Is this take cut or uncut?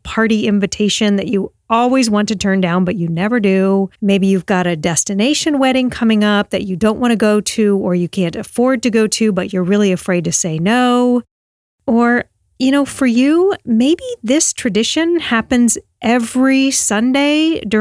cut